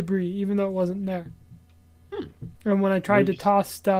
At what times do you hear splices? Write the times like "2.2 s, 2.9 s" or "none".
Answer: 2.6 s